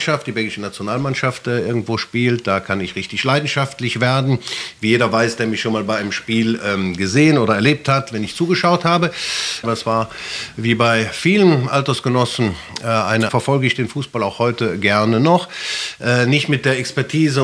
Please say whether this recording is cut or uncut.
cut